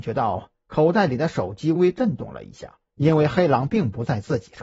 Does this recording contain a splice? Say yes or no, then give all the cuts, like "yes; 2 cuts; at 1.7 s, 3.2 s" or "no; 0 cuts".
yes; 2 cuts; at 1.8 s, 2.9 s